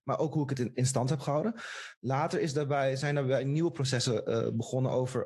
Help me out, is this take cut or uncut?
uncut